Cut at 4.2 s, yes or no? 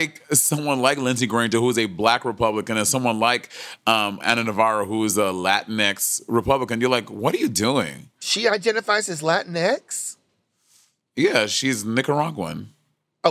yes